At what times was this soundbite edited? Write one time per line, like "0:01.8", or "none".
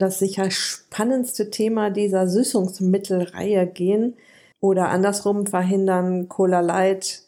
0:04.5